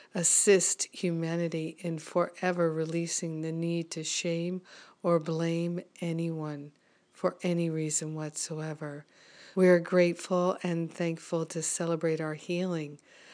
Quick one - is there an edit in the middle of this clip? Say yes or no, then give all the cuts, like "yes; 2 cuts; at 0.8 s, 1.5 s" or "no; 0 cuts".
yes; 1 cut; at 9.5 s